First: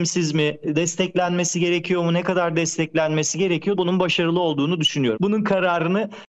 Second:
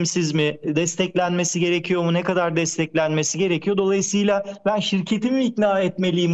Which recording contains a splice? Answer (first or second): first